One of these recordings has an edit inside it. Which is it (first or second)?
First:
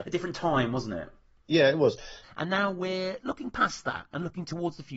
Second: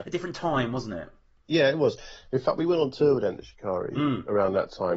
first